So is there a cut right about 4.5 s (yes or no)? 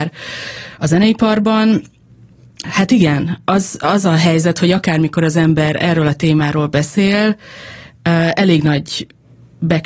no